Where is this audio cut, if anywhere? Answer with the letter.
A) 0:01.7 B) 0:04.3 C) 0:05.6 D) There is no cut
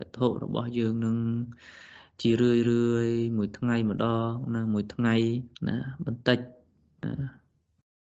C